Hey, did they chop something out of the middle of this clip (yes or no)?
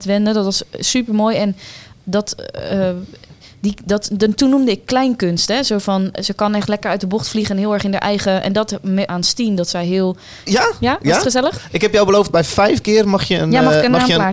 yes